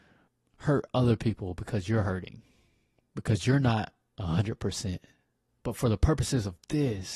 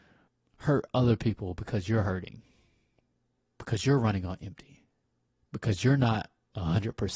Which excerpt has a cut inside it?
first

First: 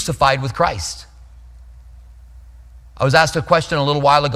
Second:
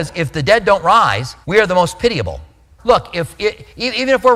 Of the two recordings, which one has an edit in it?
second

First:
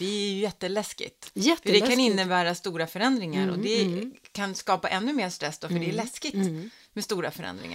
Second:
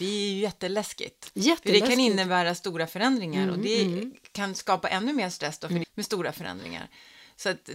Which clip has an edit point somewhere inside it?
second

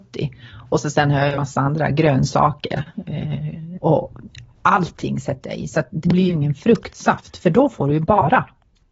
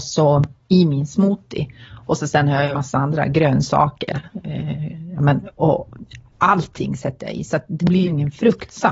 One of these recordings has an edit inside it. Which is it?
first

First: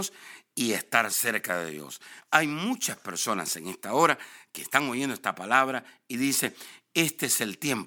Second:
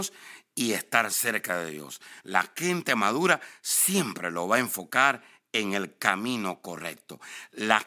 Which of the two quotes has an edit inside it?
second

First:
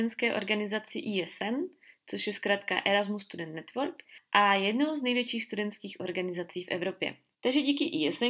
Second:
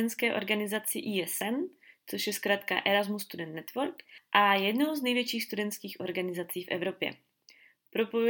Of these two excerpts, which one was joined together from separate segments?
first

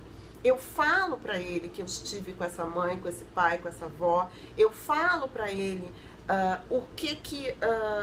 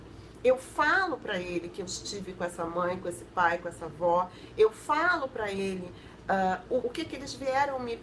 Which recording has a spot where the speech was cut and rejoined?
second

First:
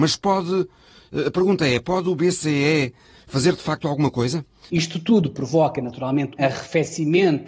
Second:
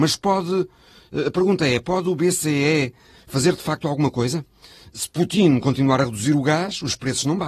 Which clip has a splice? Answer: first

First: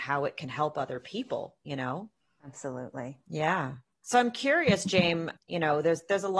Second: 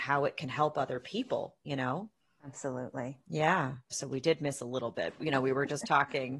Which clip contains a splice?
second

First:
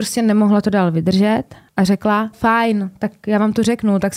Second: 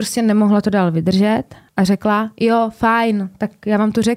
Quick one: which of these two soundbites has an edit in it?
first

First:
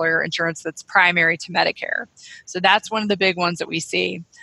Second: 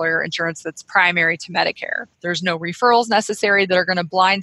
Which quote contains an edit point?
second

